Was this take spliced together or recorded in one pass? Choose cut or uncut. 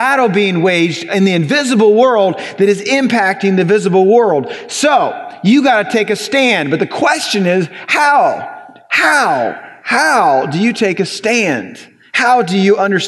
uncut